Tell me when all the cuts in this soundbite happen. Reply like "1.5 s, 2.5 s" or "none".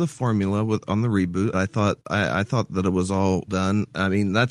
1.5 s, 3.5 s